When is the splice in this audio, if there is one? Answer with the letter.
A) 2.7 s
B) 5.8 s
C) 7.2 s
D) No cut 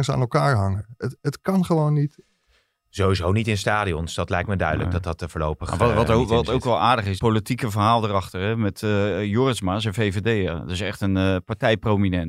C